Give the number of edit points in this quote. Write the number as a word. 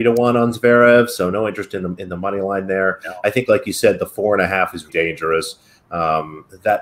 one